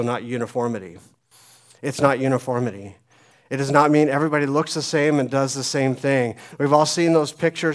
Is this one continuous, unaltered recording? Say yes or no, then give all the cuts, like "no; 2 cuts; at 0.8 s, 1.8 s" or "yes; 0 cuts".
yes; 0 cuts